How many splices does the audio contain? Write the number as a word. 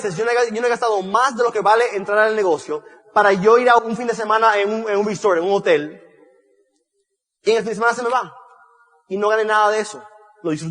one